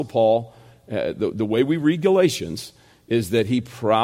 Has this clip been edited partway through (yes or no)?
no